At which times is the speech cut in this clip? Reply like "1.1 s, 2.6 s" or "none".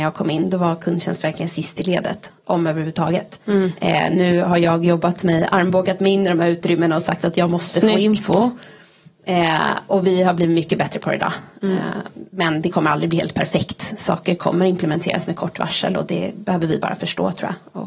none